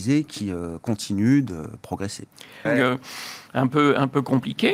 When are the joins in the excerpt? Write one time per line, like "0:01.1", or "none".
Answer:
0:02.6